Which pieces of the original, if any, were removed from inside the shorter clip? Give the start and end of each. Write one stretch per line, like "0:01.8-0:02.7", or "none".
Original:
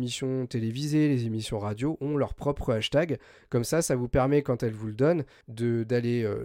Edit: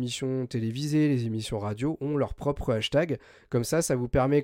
none